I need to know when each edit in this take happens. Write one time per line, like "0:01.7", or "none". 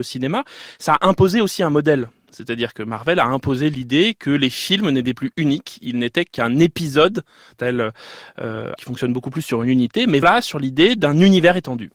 0:07.5
0:08.8
0:10.2